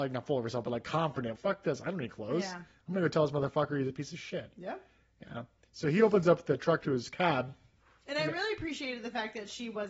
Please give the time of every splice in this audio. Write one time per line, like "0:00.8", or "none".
0:01.3